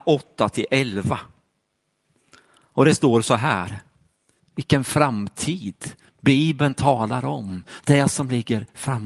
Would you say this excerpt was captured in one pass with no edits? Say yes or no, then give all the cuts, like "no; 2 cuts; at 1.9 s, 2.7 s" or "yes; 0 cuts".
no; 1 cut; at 4.4 s